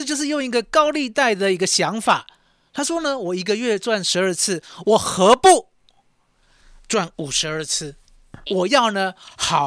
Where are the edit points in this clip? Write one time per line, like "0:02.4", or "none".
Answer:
0:08.5